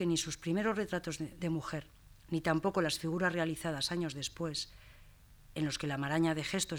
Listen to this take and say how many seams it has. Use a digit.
0